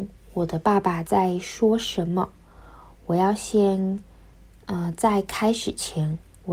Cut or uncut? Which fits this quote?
uncut